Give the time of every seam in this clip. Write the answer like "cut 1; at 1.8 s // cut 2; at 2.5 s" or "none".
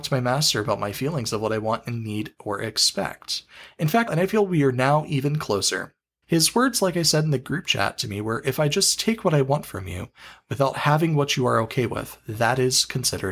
cut 1; at 4.1 s // cut 2; at 6.2 s